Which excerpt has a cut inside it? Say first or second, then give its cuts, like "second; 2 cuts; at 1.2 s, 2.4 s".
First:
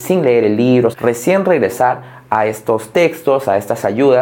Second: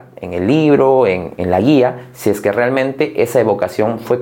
first; 1 cut; at 0.9 s